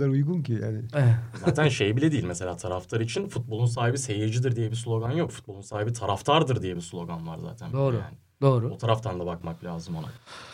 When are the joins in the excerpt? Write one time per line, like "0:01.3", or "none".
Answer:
none